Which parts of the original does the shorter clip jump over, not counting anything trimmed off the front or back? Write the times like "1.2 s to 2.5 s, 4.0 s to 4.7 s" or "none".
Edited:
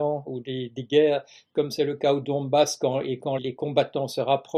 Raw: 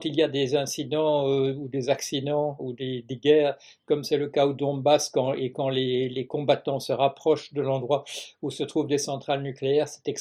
5.7 s to 6.1 s

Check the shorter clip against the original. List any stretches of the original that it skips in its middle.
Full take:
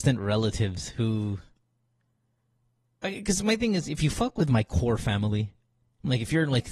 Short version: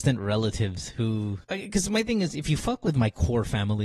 1.4 s to 3.0 s

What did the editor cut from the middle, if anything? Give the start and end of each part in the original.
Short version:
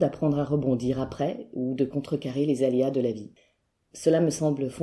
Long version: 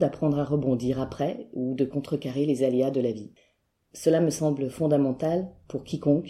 none

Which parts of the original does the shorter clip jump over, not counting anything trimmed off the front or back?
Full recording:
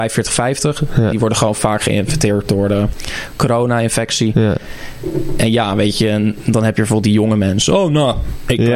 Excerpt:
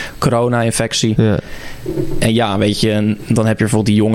none

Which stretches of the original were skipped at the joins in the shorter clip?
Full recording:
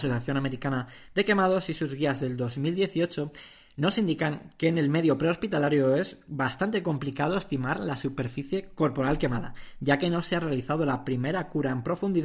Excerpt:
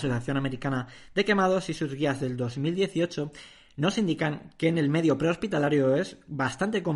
none

